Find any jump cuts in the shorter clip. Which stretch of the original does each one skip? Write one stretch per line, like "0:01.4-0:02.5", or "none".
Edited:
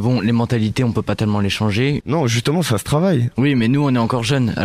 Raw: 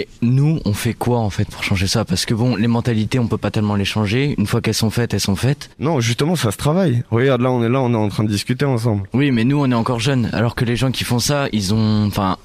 0:04.4-0:05.7
0:07.1-0:09.1